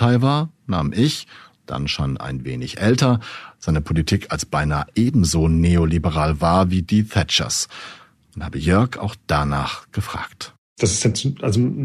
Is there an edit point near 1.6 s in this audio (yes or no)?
no